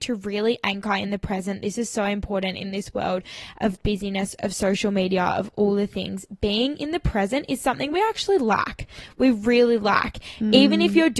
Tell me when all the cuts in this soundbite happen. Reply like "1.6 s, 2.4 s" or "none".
none